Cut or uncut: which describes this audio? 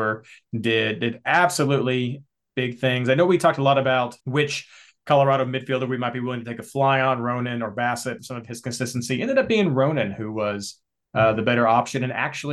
cut